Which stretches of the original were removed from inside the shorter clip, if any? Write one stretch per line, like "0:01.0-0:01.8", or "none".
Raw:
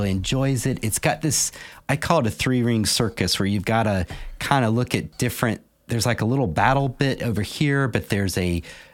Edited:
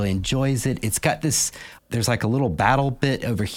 0:01.8-0:05.7